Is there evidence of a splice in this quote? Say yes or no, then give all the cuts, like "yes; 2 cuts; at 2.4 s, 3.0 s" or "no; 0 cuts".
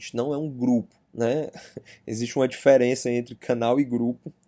yes; 1 cut; at 1.0 s